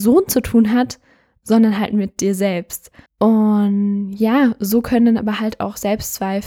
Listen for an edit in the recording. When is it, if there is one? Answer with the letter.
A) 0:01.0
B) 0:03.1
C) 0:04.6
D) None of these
B